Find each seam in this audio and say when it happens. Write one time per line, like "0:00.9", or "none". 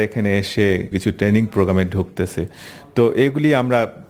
0:00.9